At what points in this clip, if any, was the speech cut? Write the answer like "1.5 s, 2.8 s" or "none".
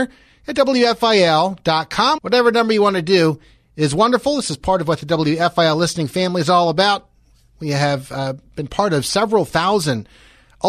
2.2 s